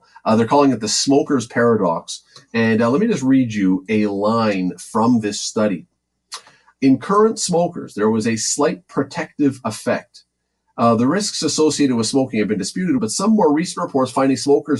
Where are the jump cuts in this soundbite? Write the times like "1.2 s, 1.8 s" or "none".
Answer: 13.0 s